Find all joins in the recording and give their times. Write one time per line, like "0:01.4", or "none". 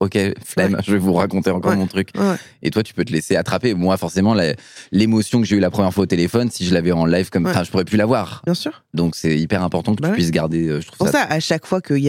none